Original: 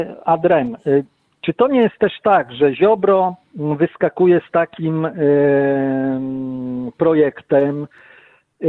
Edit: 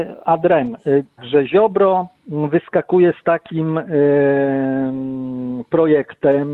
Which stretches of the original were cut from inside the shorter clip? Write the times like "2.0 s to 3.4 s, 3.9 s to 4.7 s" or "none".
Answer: 1.2 s to 2.4 s